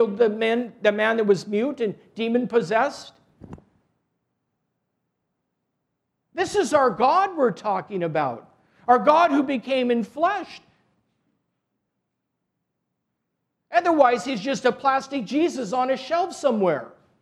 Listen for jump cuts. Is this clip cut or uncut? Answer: uncut